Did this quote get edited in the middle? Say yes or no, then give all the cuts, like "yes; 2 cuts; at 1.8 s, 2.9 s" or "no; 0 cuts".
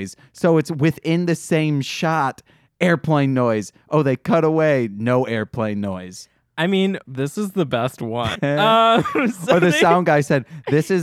yes; 2 cuts; at 7.0 s, 8.3 s